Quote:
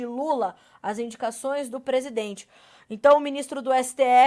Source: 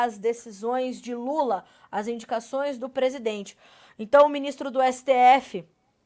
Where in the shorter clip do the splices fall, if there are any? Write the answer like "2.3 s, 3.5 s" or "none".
none